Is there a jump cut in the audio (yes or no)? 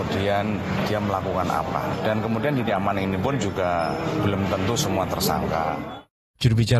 no